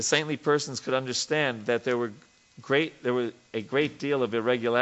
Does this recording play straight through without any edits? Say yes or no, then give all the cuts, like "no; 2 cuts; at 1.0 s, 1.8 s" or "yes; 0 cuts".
yes; 0 cuts